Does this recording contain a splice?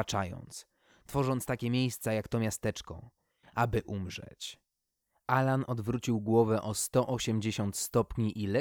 yes; 1 cut; at 3.4 s

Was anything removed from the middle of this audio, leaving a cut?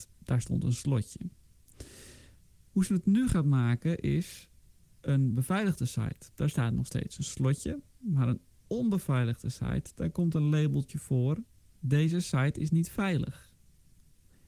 no; 0 cuts

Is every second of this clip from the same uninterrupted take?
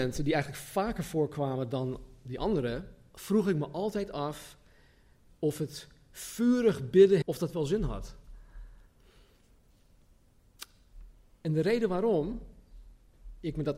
no; 1 cut; at 7.2 s

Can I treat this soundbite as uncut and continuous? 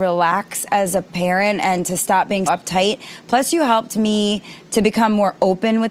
no; 1 cut; at 2.5 s

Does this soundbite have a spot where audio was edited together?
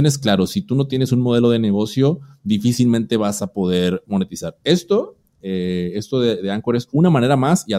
no; 0 cuts

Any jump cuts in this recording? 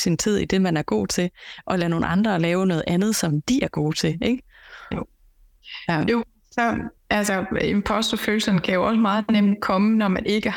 no; 0 cuts

